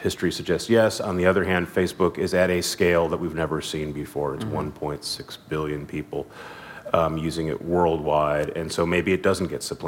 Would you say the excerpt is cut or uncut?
uncut